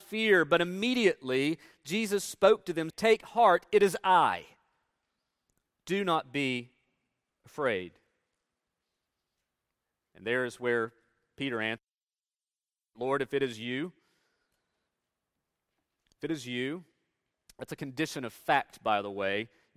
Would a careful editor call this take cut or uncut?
cut